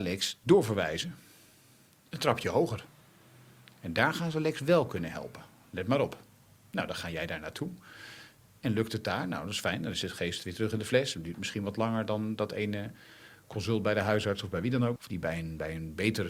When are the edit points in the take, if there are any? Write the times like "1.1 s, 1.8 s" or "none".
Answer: 15.0 s

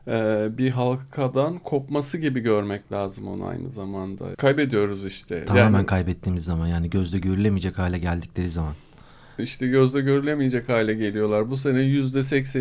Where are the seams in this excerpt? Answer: 4.3 s

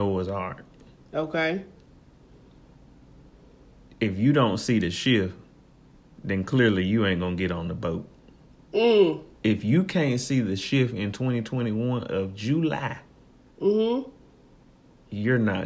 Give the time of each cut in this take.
9.3 s

